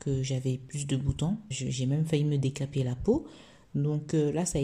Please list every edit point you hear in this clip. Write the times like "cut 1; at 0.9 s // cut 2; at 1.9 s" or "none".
cut 1; at 1.5 s

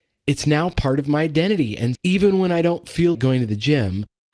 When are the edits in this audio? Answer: cut 1; at 1.9 s // cut 2; at 3.1 s

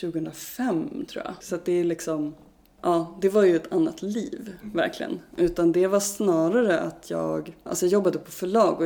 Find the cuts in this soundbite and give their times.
cut 1; at 1.4 s // cut 2; at 7.7 s

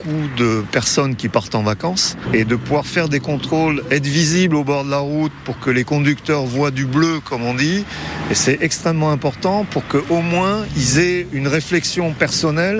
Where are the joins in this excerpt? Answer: none

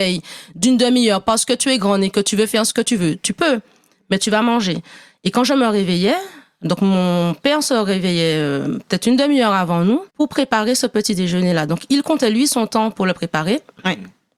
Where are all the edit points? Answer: cut 1; at 10.1 s

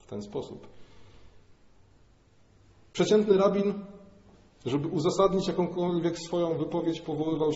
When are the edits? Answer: none

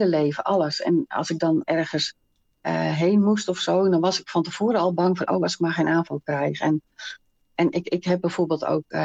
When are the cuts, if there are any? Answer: none

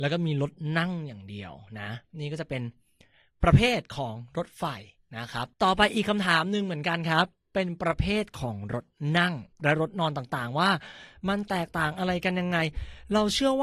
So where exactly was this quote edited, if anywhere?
cut 1; at 5.5 s // cut 2; at 9.5 s

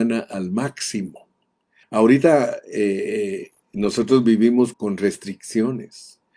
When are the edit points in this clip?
cut 1; at 1.8 s // cut 2; at 4.7 s

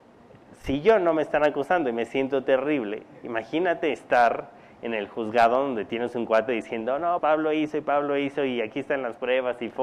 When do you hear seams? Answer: cut 1; at 7.2 s

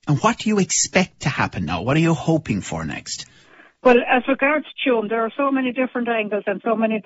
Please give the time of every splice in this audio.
none

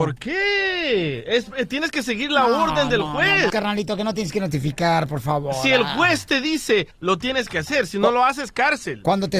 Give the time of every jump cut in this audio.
cut 1; at 3.5 s // cut 2; at 6.9 s

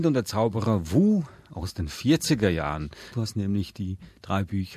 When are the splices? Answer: cut 1; at 3.1 s

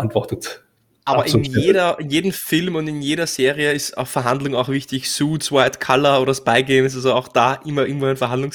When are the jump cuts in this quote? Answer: none

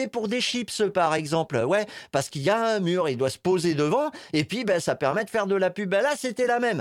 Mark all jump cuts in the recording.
none

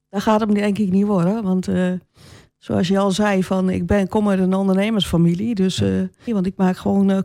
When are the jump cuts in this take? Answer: cut 1; at 6.3 s

